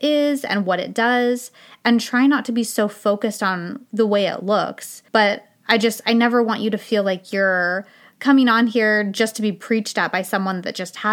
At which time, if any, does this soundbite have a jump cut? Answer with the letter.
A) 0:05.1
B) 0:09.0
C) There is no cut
A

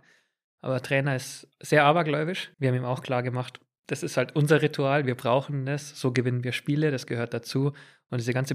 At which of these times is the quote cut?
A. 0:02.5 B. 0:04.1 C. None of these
A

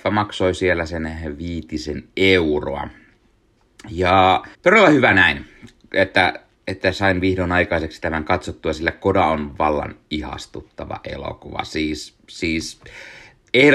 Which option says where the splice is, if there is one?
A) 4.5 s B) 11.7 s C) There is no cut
A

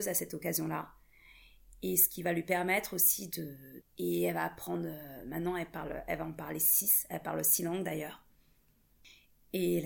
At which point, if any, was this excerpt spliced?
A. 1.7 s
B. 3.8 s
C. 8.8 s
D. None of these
B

